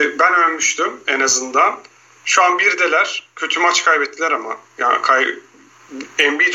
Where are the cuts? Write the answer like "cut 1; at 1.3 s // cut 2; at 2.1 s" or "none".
none